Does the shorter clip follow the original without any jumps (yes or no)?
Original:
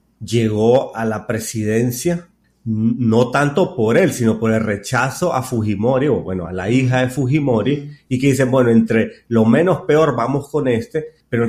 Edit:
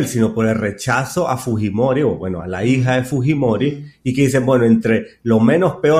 yes